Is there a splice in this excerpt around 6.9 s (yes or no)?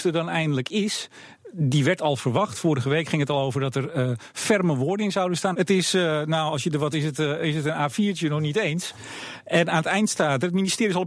yes